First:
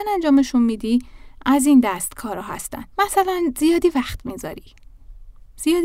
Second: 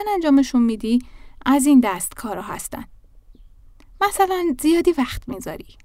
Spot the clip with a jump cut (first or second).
first